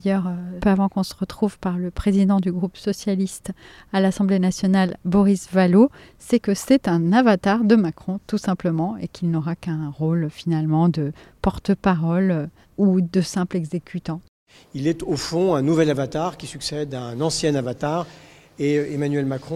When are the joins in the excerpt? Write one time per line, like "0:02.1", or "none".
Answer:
none